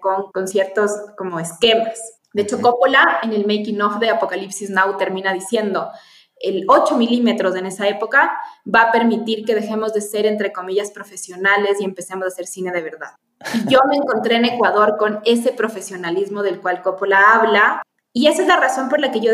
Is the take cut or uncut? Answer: uncut